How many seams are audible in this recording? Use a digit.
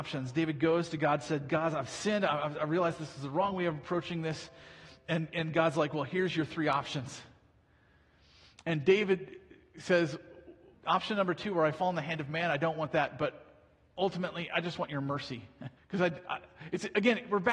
2